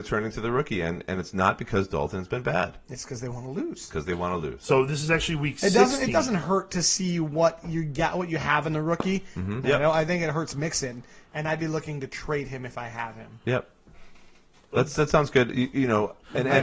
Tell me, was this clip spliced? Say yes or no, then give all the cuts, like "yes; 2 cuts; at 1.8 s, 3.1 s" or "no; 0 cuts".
yes; 1 cut; at 9.6 s